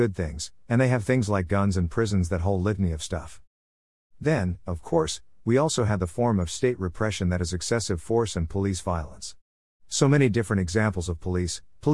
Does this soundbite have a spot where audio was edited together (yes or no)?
no